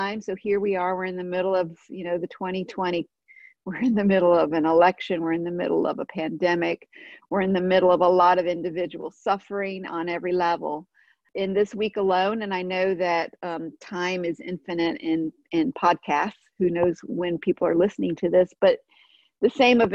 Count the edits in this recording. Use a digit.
1